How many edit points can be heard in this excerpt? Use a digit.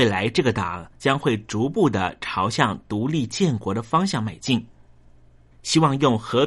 1